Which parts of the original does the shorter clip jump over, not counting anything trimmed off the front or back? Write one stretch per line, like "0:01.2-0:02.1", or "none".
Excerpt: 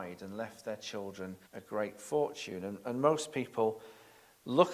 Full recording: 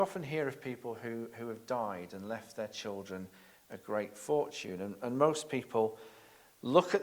0:03.4-0:03.6